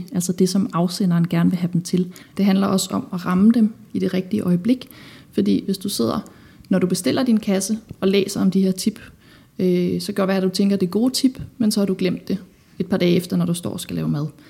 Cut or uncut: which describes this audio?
cut